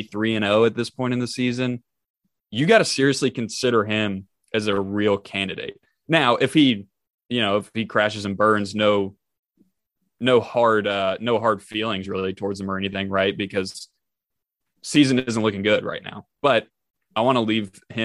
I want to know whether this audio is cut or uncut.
uncut